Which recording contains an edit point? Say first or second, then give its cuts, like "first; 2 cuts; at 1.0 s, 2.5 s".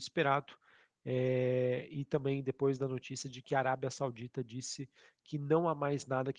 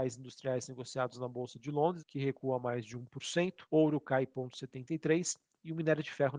second; 2 cuts; at 2.0 s, 3.7 s